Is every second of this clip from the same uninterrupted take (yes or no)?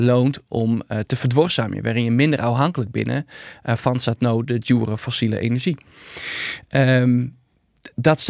yes